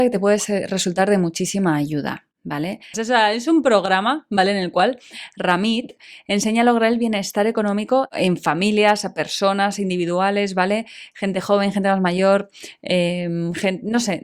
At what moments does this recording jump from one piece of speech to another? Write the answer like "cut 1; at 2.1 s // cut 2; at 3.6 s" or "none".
cut 1; at 2.9 s

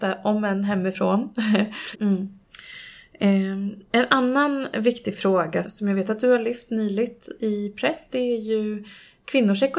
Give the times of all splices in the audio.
cut 1; at 1.9 s // cut 2; at 5.6 s

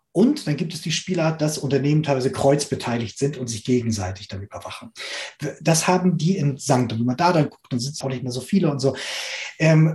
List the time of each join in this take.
cut 1; at 6.9 s // cut 2; at 8.0 s

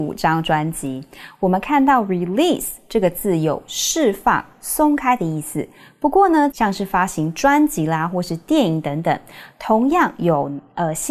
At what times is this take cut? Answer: cut 1; at 6.5 s

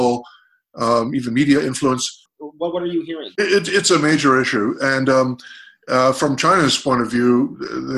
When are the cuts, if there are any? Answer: cut 1; at 2.3 s

